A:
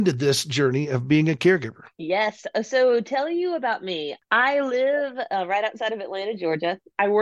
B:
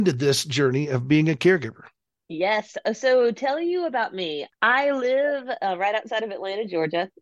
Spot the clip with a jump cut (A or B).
A